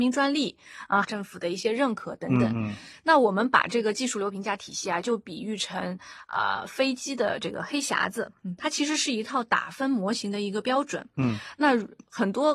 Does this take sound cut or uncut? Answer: cut